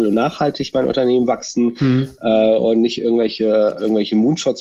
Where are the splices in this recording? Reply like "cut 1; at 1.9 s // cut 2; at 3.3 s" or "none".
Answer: none